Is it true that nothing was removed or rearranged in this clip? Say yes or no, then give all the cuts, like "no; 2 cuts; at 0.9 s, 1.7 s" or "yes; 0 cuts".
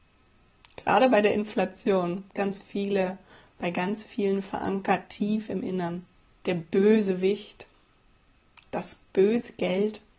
no; 2 cuts; at 2.3 s, 6.4 s